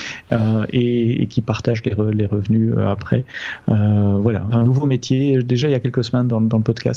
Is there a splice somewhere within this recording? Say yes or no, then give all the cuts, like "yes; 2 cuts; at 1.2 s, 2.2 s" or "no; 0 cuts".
yes; 1 cut; at 4.5 s